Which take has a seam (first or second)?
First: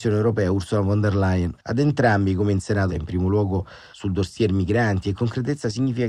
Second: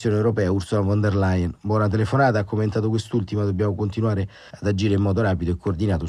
first